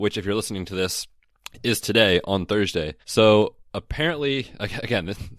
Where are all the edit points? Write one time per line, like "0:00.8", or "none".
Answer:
0:03.0